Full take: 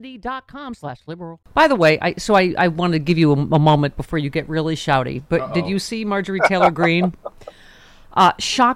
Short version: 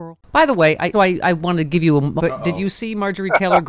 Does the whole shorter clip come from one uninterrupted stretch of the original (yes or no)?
no